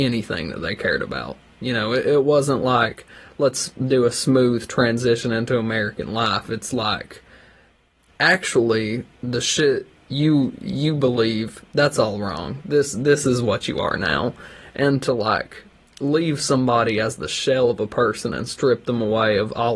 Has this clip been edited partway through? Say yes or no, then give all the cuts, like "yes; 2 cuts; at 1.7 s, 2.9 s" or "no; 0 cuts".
no; 0 cuts